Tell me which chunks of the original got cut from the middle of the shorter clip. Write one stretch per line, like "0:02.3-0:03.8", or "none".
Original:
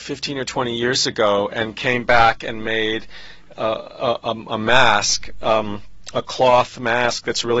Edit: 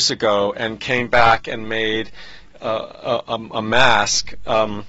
none